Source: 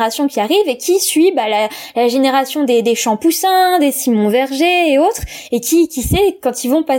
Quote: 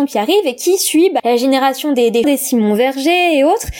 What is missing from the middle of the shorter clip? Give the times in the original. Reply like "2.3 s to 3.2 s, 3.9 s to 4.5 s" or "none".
1.4 s to 1.9 s, 3.0 s to 3.8 s